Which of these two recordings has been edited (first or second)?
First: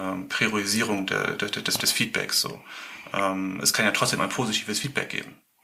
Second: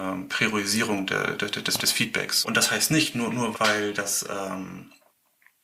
second